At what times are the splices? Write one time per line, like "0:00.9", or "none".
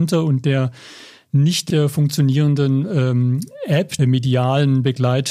0:01.7
0:04.0